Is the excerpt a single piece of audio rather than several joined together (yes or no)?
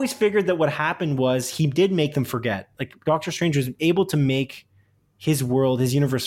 yes